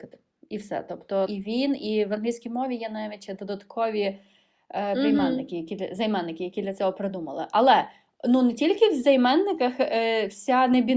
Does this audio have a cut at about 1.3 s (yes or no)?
yes